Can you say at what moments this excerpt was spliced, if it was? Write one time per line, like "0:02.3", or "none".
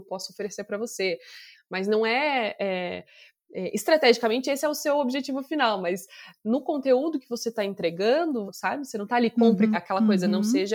0:01.5
0:08.5
0:09.7